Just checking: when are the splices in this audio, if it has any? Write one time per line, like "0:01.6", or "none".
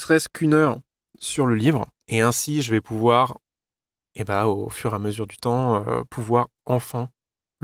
0:02.0